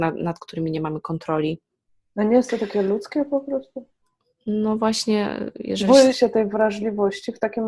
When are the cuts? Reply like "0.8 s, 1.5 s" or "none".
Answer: 6.1 s